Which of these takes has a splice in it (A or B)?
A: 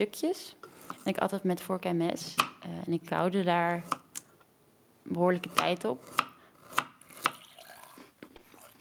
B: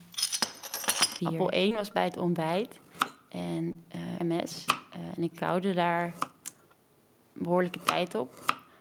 B